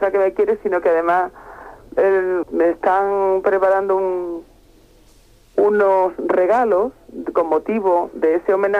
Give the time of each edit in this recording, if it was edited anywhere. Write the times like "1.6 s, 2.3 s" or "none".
2.4 s